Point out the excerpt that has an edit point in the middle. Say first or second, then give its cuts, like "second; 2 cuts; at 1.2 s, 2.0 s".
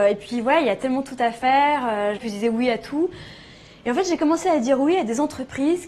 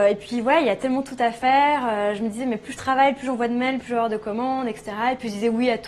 first; 1 cut; at 2.2 s